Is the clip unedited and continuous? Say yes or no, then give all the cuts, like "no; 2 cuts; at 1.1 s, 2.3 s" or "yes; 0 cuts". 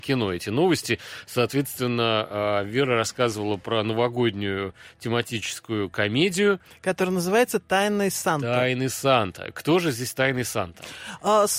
yes; 0 cuts